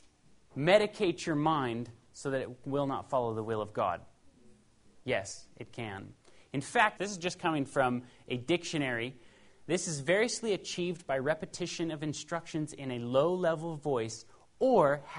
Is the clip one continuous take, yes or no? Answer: no